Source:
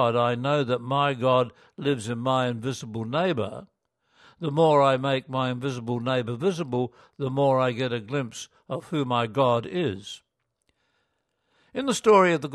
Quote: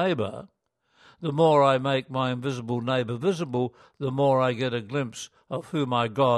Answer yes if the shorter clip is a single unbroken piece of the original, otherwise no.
yes